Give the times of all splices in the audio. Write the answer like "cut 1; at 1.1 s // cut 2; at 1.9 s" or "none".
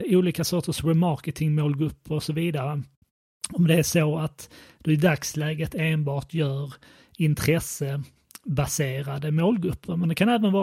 none